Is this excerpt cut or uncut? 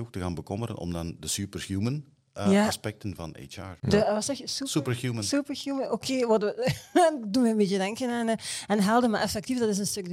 cut